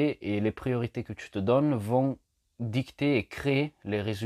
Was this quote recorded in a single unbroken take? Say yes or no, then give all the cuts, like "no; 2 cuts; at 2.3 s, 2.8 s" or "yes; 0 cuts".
yes; 0 cuts